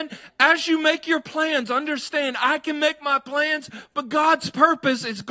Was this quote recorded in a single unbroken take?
yes; 0 cuts

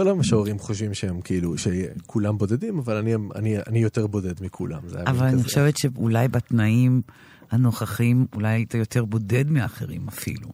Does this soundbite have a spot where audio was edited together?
no; 0 cuts

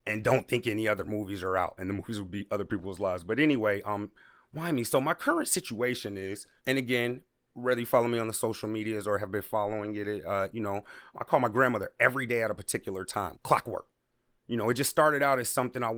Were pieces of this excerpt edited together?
yes; 3 cuts; at 6.6 s, 11.1 s, 13.3 s

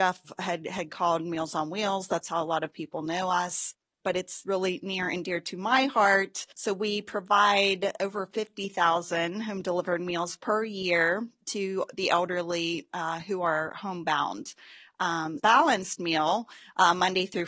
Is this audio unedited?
no; 2 cuts; at 6.5 s, 15.4 s

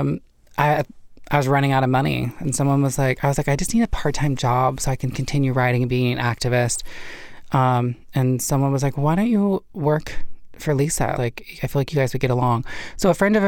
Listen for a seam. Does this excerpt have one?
yes; 1 cut; at 11.2 s

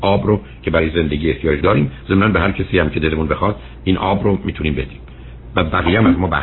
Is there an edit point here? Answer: yes; 1 cut; at 1.6 s

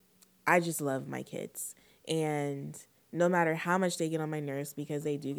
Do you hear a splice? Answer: no; 0 cuts

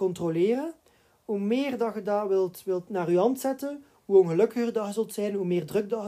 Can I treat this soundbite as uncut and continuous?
yes; 0 cuts

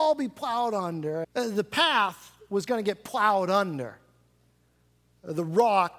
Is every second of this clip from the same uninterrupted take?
no; 1 cut; at 1.2 s

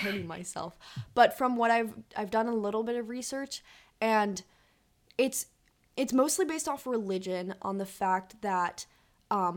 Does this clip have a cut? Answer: no; 0 cuts

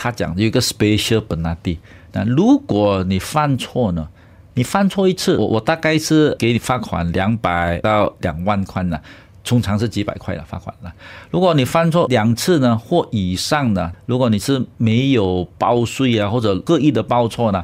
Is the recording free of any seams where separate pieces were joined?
yes; 0 cuts

